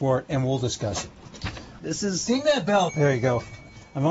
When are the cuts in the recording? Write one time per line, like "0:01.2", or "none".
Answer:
0:01.8
0:02.9